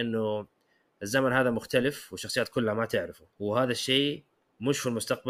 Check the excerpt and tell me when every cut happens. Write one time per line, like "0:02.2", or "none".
0:03.3